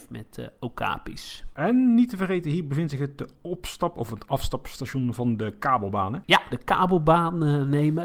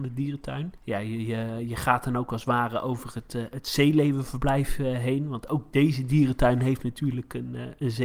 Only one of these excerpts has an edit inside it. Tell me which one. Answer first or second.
first